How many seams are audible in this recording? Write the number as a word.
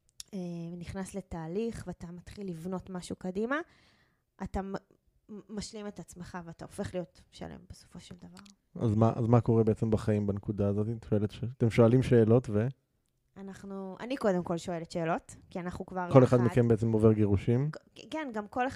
one